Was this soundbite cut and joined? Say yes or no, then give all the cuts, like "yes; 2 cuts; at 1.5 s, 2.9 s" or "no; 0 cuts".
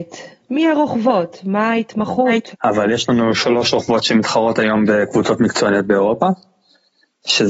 yes; 1 cut; at 2.5 s